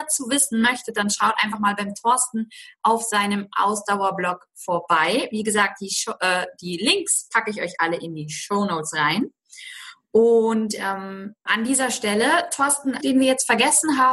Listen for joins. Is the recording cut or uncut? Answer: cut